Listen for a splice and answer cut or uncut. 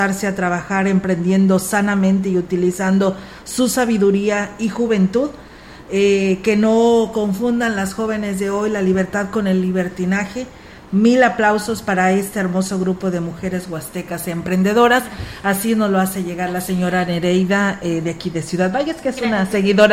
uncut